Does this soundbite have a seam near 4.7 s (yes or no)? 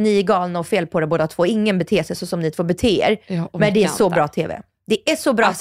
no